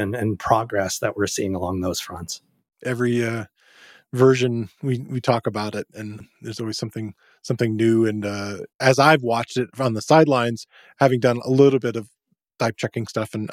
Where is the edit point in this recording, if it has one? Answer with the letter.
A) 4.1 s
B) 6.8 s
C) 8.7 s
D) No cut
C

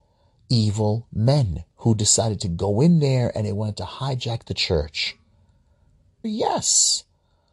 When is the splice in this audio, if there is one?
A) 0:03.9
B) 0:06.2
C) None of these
B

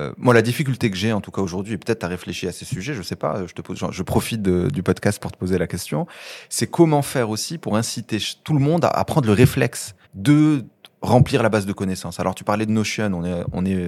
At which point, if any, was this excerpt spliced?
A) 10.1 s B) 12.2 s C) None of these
A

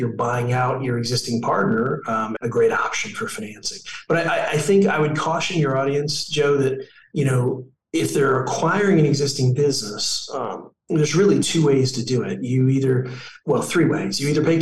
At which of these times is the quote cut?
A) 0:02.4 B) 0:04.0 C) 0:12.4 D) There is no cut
A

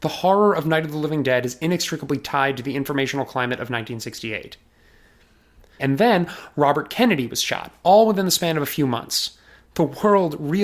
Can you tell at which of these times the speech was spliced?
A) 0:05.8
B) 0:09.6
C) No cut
A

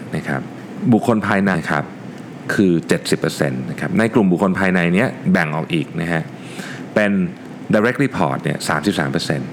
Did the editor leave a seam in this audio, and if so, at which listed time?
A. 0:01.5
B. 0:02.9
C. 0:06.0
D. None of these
A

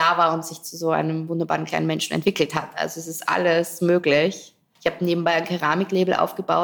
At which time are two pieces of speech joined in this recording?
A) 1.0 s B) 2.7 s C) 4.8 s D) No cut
C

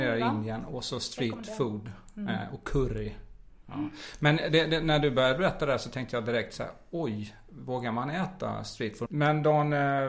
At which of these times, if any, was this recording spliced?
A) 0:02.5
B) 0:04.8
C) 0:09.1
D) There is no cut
C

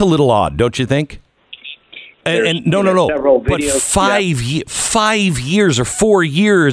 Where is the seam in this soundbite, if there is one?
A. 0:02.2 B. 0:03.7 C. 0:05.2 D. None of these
A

